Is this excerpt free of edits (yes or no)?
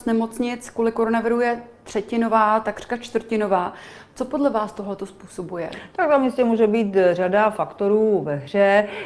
yes